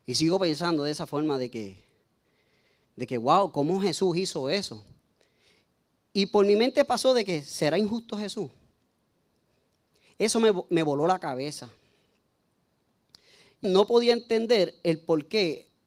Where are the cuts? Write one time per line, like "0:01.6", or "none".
0:13.6